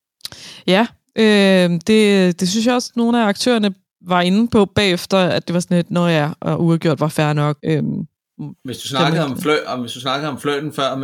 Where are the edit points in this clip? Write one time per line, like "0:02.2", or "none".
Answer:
0:07.6

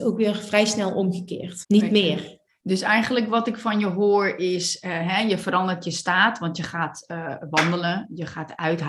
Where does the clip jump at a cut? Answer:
0:01.6

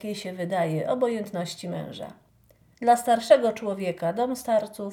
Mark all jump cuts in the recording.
0:02.7

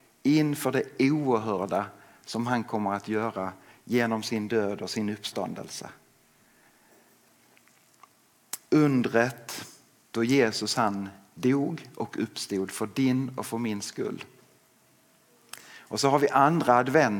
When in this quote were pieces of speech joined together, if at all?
none

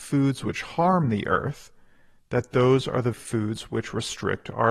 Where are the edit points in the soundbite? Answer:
0:03.1

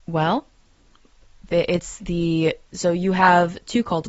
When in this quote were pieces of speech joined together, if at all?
0:02.7

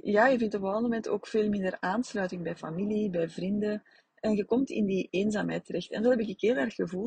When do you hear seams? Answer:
none

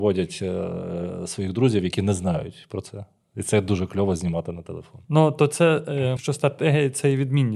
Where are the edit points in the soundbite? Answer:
0:05.0
0:06.2

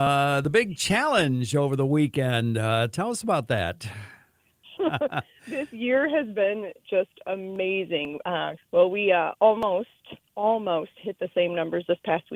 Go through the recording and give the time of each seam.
0:04.8
0:08.6

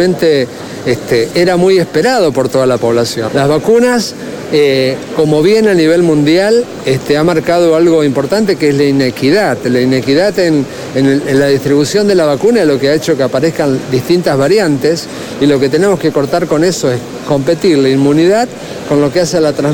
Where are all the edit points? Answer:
0:03.3

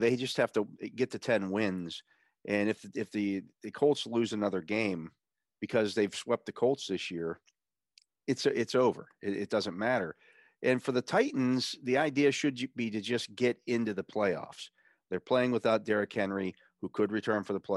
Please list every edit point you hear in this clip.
none

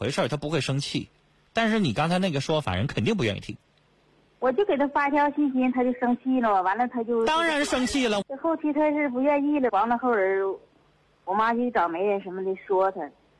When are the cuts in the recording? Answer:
0:08.2
0:09.7

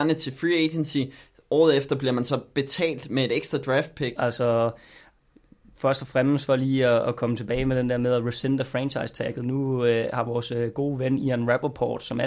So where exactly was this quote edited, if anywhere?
0:04.2

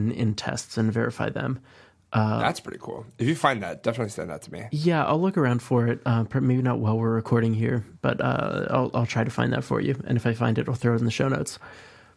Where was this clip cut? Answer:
none

